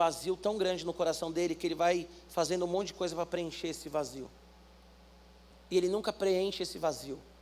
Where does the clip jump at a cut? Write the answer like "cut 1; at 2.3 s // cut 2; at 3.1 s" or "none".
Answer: cut 1; at 5.5 s